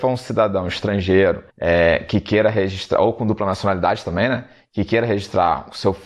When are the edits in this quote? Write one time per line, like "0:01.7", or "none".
0:01.5